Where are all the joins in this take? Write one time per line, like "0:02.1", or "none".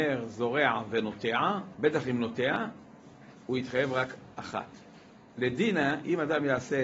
0:01.7
0:05.3